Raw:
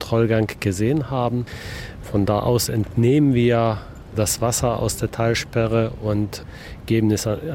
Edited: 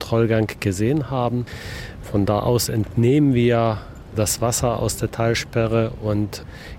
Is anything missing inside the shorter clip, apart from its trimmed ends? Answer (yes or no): no